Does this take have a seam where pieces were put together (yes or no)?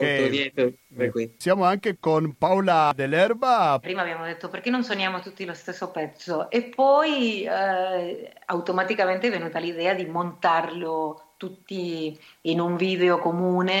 yes